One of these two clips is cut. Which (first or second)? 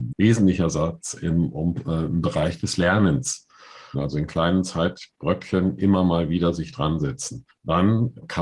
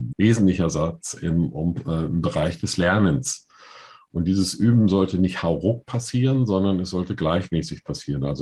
first